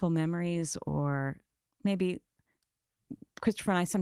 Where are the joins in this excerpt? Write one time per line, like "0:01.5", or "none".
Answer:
none